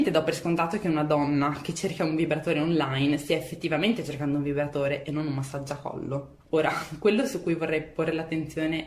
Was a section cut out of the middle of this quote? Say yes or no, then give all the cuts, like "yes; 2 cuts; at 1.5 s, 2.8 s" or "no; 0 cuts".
yes; 1 cut; at 6.4 s